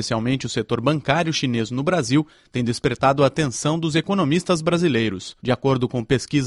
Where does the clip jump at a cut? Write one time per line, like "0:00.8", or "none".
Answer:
0:05.4